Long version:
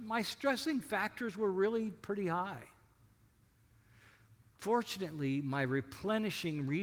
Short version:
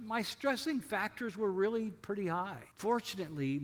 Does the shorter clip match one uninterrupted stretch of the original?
no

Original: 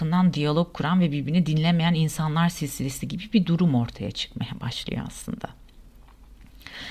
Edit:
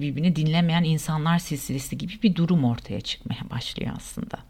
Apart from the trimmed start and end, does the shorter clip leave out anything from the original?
no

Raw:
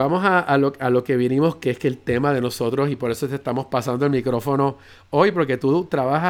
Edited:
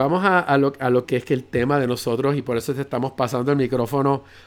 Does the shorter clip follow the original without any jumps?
no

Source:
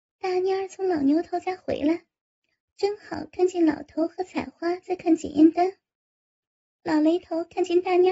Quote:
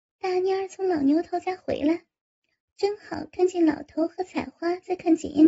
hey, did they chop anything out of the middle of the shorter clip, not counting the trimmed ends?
no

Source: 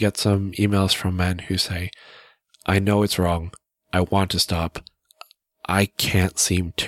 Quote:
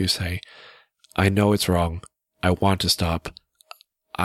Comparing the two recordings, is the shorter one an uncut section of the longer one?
yes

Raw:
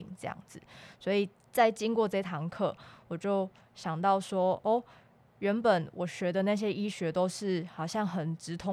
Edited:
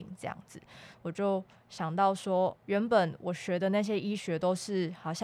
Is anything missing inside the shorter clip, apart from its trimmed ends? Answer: yes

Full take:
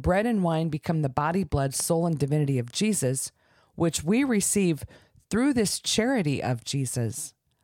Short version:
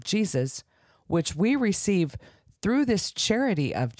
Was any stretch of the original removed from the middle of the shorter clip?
no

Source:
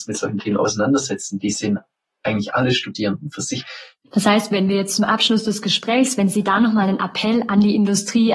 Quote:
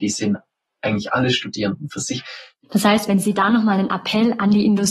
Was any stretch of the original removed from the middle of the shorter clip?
yes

